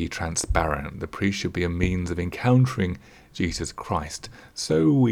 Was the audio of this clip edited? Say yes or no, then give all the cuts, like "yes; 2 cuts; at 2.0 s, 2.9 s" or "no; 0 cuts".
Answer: no; 0 cuts